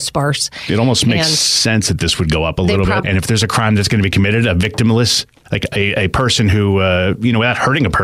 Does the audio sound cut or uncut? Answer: cut